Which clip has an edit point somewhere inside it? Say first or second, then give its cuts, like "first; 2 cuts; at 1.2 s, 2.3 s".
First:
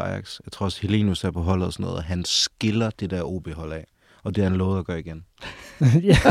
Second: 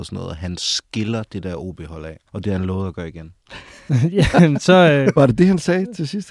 second; 1 cut; at 2.3 s